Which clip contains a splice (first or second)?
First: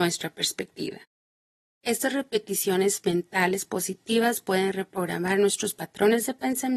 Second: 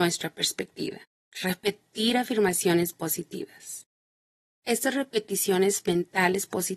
second